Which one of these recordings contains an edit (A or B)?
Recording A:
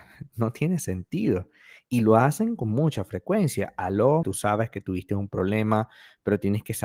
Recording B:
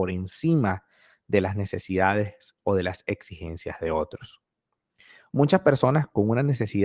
A